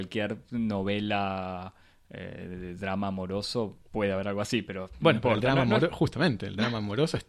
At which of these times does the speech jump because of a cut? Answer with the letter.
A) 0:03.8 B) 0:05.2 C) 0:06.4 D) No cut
A